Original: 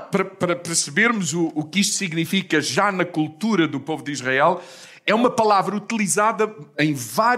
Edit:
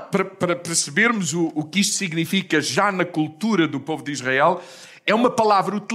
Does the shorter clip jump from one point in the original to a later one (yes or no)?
no